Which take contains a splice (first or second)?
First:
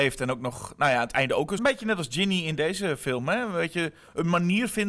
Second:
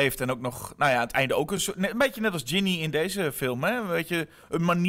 first